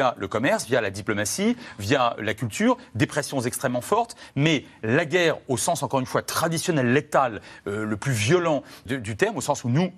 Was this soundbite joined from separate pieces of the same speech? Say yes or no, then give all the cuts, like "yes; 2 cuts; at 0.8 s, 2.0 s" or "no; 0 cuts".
yes; 1 cut; at 8.9 s